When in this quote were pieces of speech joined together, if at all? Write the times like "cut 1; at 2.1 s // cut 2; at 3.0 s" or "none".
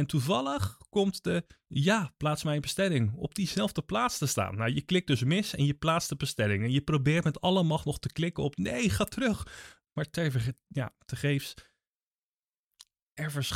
none